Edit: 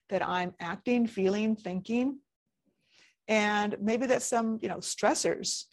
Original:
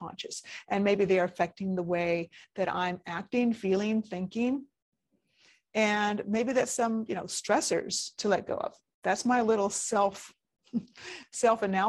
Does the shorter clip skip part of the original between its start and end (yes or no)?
no